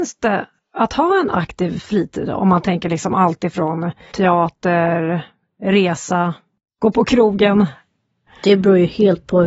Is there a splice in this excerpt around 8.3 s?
yes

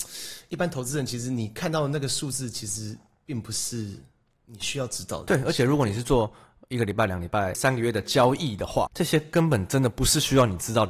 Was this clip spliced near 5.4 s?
no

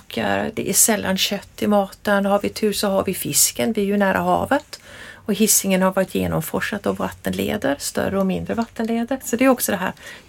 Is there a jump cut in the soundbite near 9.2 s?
yes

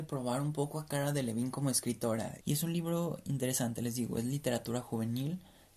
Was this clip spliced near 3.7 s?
no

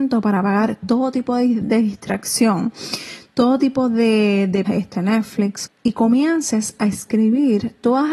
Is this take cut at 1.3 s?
no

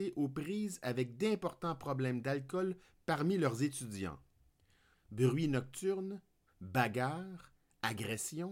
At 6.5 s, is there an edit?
yes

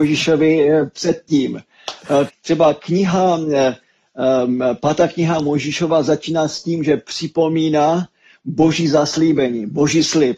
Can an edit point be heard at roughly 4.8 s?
no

